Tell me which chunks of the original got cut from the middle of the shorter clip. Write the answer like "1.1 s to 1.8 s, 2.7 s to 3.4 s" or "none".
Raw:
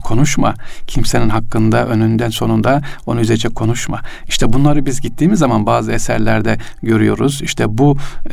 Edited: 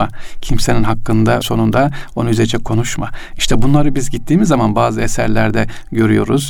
1.9 s to 2.3 s